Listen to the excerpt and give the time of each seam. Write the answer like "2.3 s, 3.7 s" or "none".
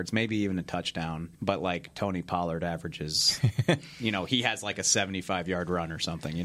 1.3 s